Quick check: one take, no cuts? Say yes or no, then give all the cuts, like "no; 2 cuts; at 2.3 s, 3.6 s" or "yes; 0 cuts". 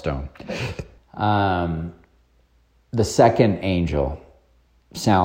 no; 1 cut; at 1.0 s